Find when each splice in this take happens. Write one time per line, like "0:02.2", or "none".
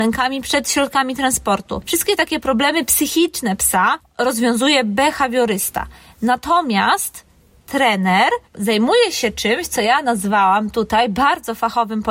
0:08.4